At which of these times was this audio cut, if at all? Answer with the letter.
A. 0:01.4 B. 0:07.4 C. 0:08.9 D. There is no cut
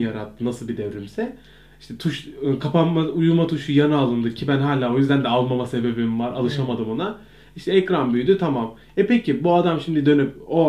D